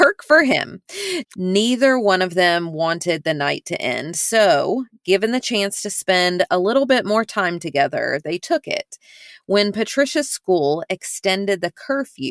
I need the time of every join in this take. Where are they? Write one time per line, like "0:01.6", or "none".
0:01.2